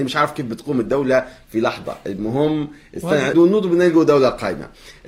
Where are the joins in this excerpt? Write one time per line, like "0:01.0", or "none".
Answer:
0:03.3